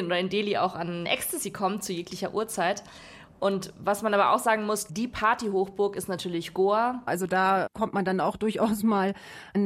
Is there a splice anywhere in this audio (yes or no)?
yes